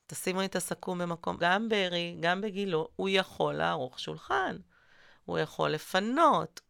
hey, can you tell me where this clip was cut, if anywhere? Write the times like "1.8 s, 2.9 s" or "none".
1.4 s